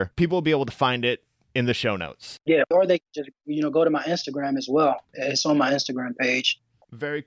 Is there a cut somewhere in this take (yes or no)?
no